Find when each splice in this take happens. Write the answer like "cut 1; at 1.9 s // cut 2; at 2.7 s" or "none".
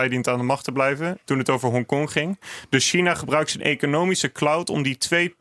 cut 1; at 1.3 s